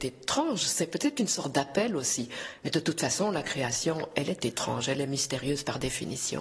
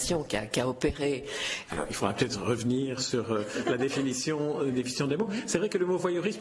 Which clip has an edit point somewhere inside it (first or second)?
second